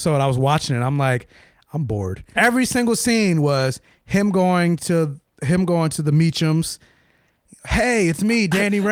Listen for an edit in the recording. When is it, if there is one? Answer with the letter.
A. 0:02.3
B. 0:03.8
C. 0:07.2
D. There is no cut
A